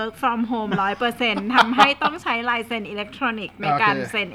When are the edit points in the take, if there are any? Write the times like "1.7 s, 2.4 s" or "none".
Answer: none